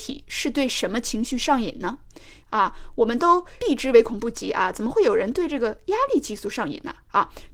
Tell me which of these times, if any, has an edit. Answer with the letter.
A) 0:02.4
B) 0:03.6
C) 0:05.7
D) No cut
A